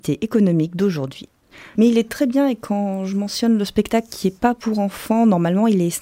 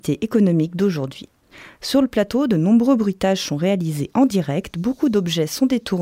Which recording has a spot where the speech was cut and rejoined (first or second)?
first